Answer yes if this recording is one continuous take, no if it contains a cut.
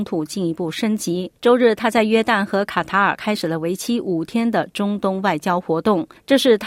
no